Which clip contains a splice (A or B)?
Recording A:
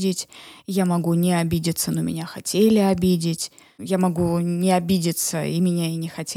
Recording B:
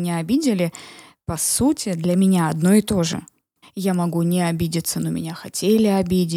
B